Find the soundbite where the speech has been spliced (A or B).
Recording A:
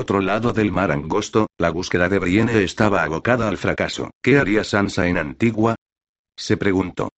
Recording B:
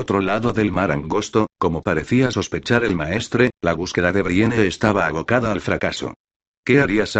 A